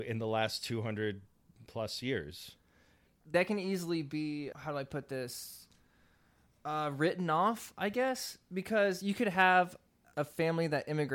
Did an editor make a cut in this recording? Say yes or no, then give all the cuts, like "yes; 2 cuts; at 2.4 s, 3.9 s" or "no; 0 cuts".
yes; 1 cut; at 4.5 s